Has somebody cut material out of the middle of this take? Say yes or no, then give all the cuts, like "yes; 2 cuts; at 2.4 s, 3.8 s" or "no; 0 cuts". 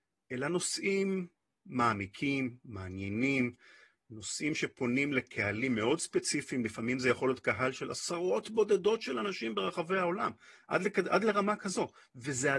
no; 0 cuts